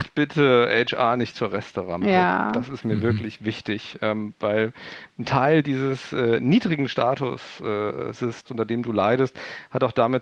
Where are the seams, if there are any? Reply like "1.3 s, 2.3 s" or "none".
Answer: 8.4 s